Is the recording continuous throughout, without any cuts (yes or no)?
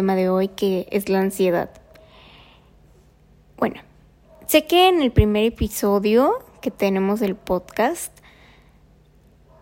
yes